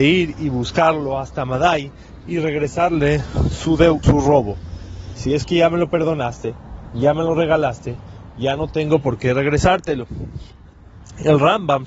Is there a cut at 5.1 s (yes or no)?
yes